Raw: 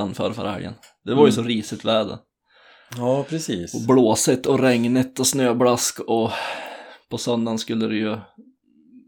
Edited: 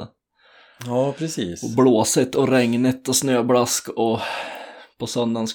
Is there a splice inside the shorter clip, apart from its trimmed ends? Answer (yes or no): no